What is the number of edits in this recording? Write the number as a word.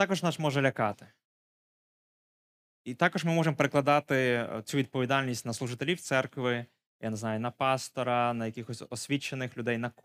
zero